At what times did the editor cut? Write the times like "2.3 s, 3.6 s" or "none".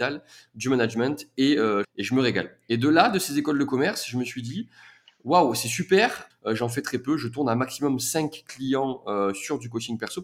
1.8 s, 6.3 s